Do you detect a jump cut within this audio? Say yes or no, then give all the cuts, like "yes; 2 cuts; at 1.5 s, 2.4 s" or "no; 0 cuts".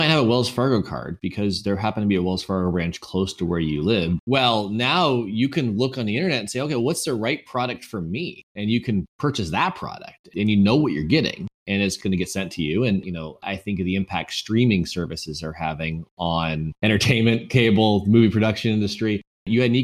yes; 2 cuts; at 4.2 s, 13.0 s